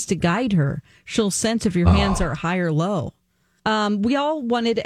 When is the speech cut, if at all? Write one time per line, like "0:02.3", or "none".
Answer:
0:03.6